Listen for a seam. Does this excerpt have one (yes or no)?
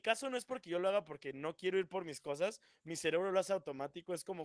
no